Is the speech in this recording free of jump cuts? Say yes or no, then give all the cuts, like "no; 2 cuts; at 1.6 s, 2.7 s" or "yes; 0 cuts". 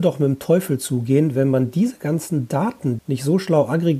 no; 1 cut; at 3.0 s